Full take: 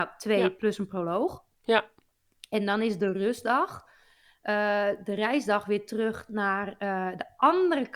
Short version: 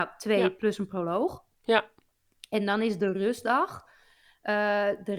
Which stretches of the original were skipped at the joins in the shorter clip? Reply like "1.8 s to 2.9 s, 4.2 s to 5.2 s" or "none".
none